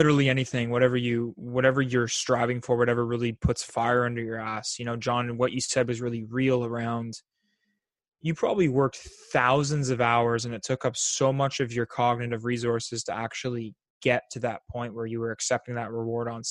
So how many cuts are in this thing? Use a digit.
0